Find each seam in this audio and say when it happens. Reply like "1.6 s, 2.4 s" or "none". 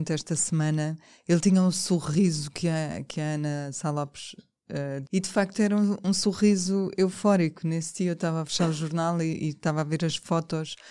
5.1 s